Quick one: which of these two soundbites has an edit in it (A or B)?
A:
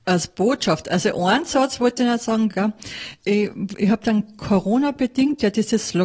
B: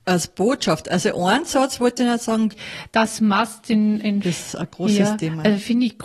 B